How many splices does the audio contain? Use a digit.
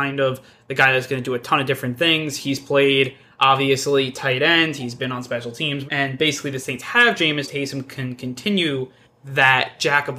2